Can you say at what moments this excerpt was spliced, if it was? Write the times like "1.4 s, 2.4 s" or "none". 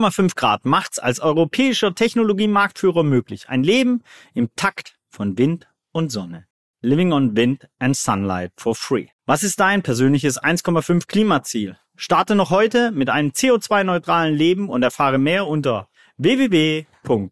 9.2 s